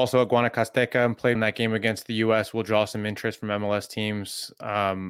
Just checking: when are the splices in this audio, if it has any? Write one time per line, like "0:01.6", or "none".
0:01.3